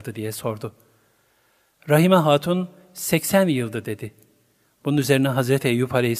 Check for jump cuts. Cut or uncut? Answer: uncut